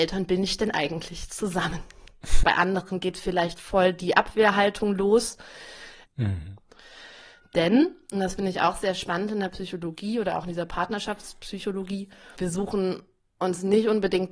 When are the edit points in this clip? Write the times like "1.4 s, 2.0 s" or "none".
2.4 s, 6.1 s, 12.3 s